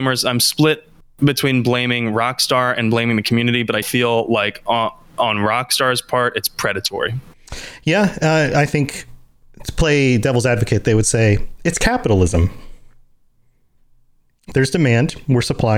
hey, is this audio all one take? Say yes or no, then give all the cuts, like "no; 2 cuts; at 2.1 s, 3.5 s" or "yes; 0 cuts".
no; 1 cut; at 3.8 s